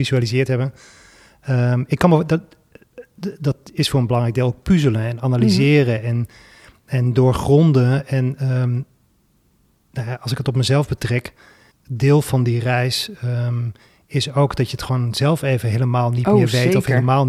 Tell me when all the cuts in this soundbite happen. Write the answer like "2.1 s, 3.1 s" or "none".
11.7 s